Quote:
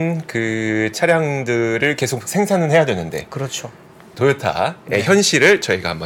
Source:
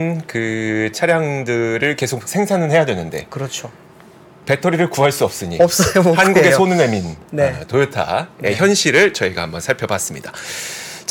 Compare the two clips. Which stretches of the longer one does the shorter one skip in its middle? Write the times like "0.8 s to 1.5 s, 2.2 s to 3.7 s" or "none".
4.1 s to 7.7 s